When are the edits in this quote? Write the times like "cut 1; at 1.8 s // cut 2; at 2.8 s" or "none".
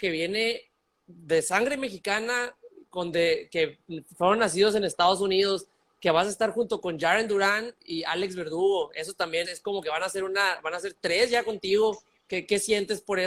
cut 1; at 9.4 s